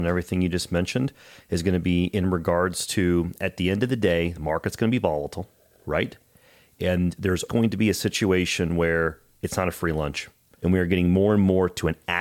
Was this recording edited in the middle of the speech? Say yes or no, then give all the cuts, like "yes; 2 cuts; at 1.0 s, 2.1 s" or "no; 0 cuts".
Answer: yes; 2 cuts; at 7.5 s, 10.6 s